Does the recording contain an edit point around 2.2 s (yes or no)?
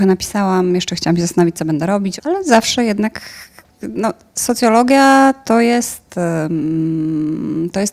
yes